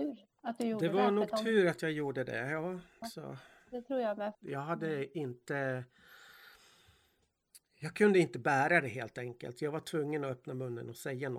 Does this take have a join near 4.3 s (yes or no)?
yes